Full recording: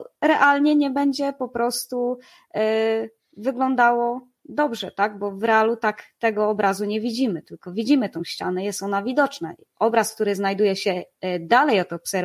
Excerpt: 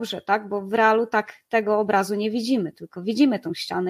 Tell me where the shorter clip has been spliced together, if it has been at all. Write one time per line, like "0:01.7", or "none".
none